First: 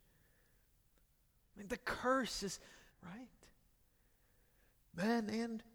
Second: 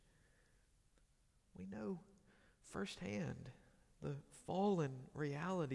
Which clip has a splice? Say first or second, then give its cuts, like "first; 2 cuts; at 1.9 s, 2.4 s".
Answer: first; 2 cuts; at 1.4 s, 2.9 s